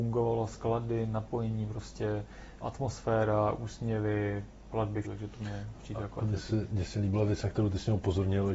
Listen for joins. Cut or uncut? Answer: cut